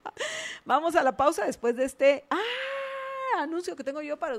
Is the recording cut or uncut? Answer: uncut